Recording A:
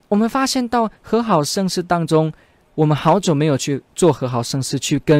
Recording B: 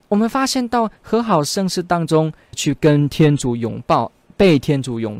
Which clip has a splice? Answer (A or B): B